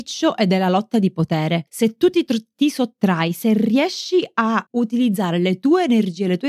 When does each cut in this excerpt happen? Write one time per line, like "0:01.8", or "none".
none